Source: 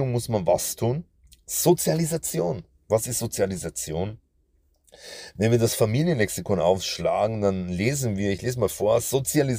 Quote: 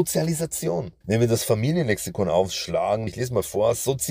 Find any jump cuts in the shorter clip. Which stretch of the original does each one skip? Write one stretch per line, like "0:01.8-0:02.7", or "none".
0:02.7-0:05.3
0:07.4-0:08.3